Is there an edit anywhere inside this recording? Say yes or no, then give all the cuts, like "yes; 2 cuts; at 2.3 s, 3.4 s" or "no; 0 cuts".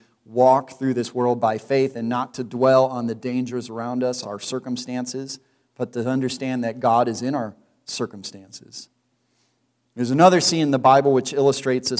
no; 0 cuts